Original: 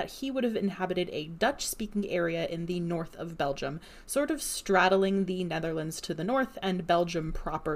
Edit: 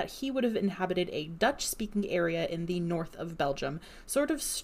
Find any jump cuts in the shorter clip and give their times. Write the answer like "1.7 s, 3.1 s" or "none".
none